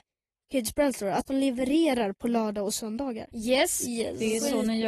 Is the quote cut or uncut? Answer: cut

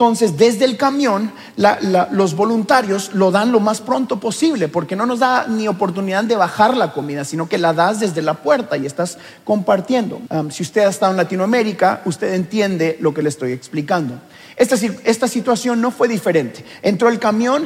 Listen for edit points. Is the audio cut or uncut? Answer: cut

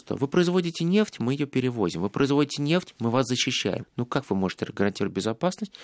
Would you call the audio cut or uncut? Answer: cut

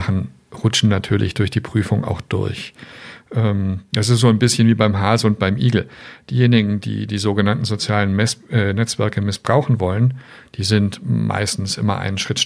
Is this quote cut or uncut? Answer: uncut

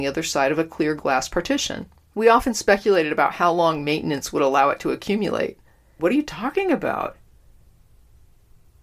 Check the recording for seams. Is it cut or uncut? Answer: cut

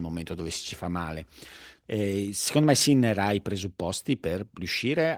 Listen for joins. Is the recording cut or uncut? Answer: cut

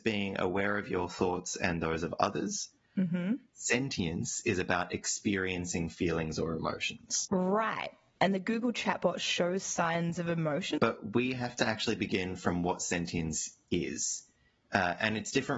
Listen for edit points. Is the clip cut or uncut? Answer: cut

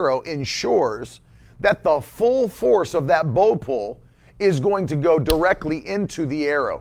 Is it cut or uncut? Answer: uncut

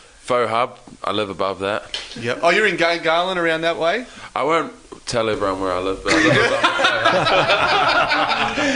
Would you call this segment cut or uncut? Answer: uncut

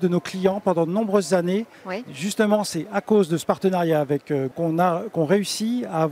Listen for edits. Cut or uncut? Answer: cut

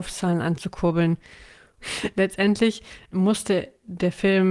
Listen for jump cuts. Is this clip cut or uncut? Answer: cut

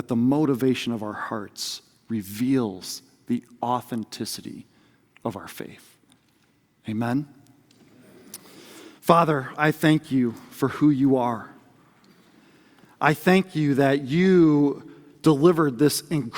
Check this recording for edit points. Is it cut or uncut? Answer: uncut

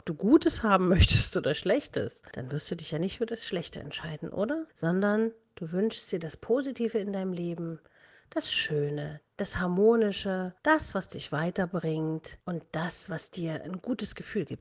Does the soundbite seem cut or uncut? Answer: uncut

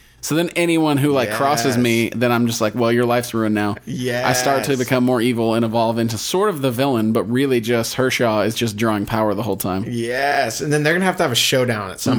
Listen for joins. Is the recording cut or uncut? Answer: uncut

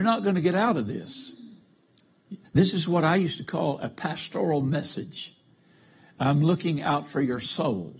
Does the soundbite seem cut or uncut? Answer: cut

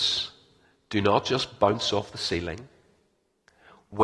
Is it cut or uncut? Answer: uncut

